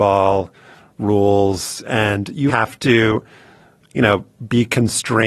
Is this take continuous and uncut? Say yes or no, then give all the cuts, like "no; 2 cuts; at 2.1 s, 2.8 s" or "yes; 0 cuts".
no; 1 cut; at 2.5 s